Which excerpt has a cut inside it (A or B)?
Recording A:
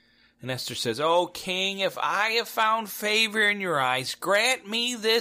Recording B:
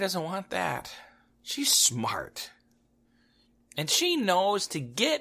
B